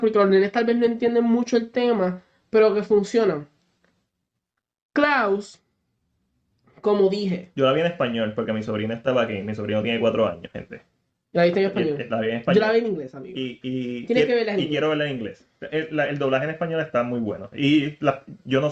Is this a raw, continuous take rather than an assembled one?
yes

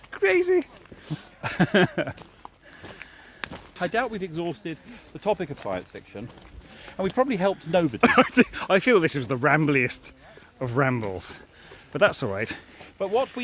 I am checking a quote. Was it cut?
yes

